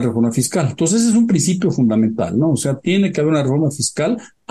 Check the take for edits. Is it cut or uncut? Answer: uncut